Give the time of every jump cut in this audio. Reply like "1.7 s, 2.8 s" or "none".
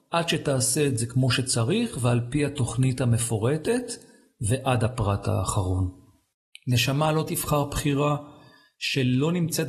6.5 s